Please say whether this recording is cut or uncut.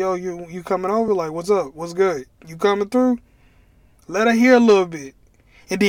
uncut